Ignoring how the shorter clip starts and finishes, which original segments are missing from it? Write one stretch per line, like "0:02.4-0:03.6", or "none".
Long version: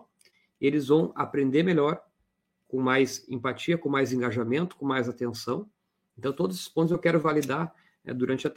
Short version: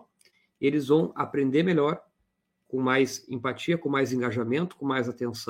none